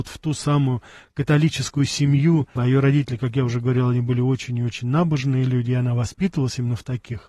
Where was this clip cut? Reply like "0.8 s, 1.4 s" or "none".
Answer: 2.6 s